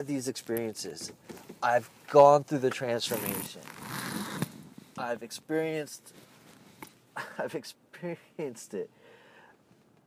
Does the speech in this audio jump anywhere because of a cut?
no; 0 cuts

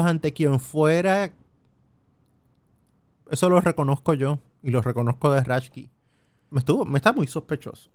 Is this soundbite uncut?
no; 2 cuts; at 3.1 s, 6.5 s

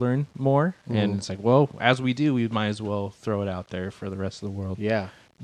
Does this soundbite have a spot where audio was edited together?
no; 0 cuts

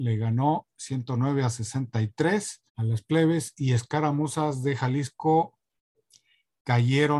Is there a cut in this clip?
yes; 1 cut; at 2.7 s

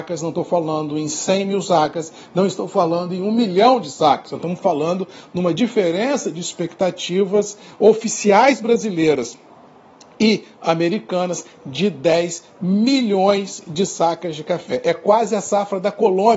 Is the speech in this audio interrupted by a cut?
no; 0 cuts

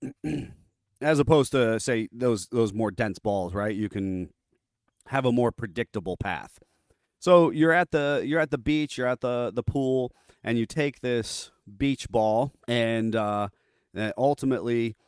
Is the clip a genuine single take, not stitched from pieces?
no; 1 cut; at 12.6 s

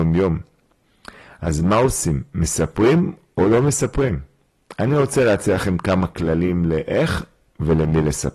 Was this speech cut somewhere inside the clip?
no; 0 cuts

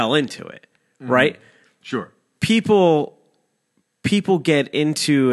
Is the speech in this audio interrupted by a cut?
no; 0 cuts

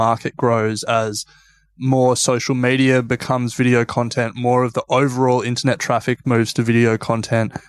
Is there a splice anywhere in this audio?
no; 0 cuts

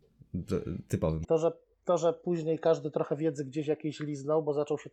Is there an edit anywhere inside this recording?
yes; 1 cut; at 1.2 s

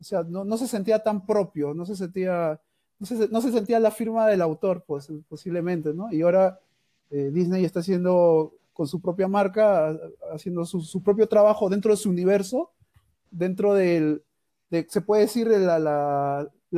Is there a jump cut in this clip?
no; 0 cuts

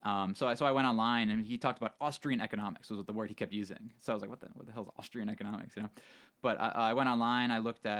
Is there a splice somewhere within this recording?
no; 0 cuts

